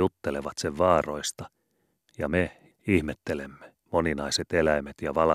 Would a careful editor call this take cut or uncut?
cut